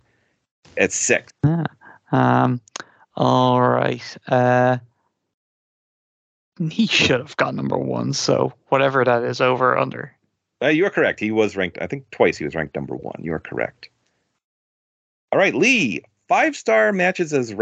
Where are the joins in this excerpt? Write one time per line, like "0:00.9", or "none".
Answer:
0:01.3